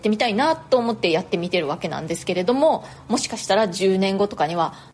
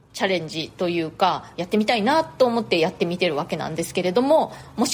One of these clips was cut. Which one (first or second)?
second